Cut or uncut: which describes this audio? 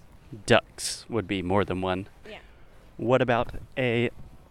cut